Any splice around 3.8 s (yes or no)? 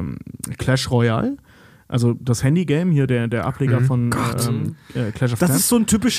no